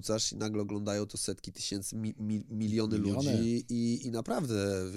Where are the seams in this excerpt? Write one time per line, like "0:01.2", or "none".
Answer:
none